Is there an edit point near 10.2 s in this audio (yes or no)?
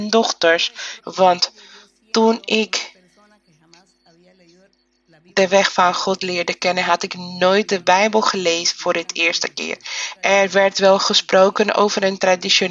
yes